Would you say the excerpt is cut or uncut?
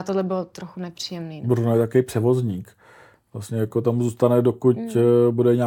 uncut